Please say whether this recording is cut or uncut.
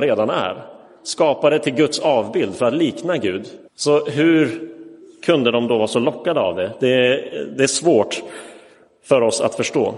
cut